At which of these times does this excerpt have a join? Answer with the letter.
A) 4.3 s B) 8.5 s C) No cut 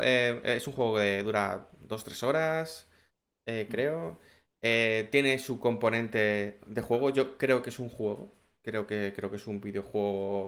C